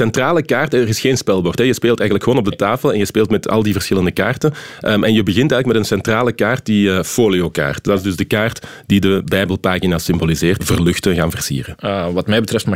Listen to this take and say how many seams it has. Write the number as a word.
two